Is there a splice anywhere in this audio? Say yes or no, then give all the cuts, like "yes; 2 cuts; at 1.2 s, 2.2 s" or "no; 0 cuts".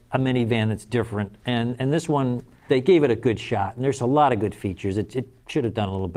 yes; 1 cut; at 2.7 s